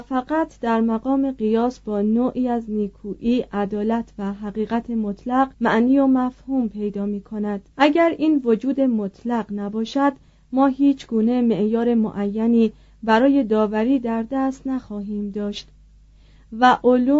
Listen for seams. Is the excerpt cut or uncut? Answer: cut